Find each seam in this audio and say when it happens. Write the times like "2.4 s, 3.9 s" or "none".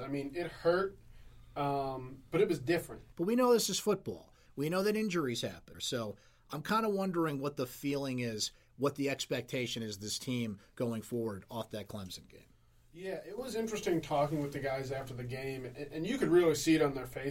3.1 s, 4.5 s, 5.7 s